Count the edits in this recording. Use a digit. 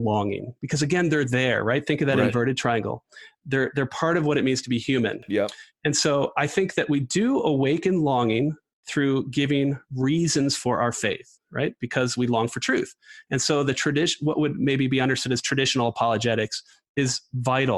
0